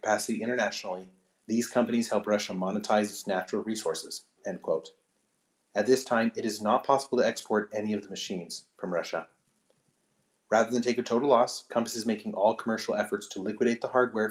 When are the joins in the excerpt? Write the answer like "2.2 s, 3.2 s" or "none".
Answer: 5.6 s